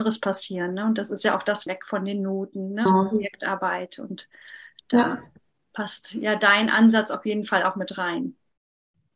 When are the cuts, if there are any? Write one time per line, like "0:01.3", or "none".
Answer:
0:01.7
0:02.9